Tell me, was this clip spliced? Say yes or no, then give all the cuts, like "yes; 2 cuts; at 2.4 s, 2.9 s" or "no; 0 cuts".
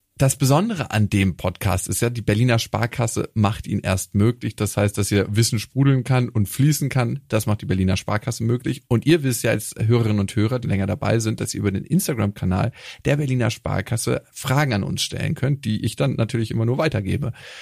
yes; 1 cut; at 10.6 s